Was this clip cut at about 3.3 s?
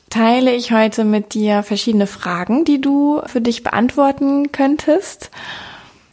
yes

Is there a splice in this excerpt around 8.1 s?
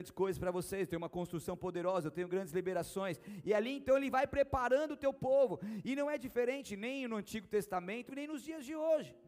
yes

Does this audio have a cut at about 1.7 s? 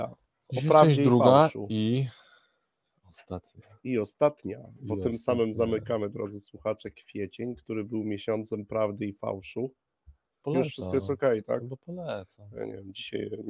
no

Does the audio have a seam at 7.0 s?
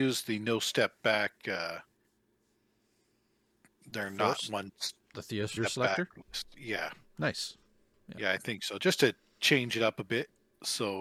no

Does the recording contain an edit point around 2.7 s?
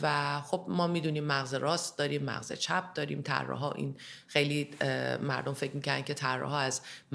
no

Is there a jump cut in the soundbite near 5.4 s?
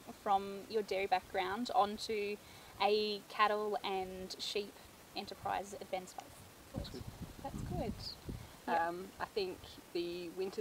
no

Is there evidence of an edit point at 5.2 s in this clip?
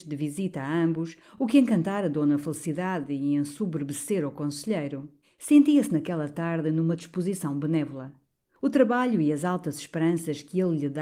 yes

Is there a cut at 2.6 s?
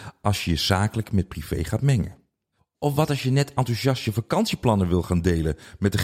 yes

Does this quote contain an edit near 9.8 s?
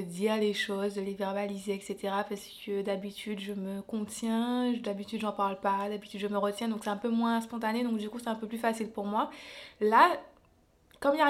no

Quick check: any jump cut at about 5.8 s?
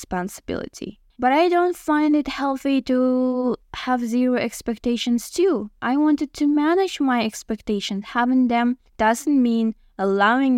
no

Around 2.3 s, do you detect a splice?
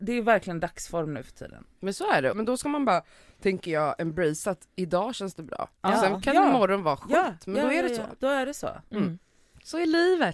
yes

